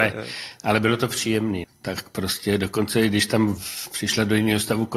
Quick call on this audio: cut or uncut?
cut